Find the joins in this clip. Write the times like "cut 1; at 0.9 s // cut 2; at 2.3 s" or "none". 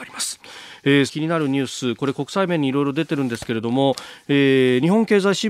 cut 1; at 1.1 s